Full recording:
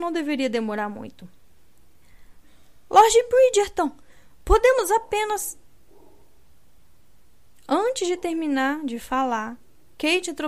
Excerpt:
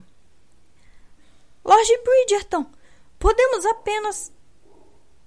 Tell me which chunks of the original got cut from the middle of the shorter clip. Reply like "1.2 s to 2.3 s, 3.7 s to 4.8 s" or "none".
none